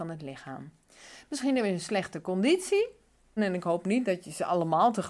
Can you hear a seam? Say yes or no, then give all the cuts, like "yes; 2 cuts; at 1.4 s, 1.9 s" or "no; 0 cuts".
yes; 1 cut; at 3.4 s